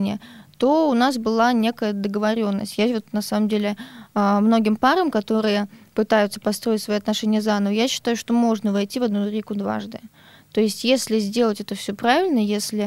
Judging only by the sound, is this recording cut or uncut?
uncut